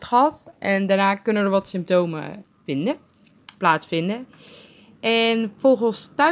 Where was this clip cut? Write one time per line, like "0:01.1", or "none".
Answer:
0:02.4